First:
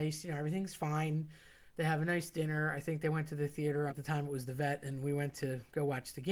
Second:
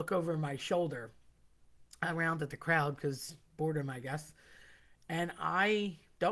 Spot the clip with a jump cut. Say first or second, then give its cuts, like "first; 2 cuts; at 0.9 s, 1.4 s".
first; 1 cut; at 3.9 s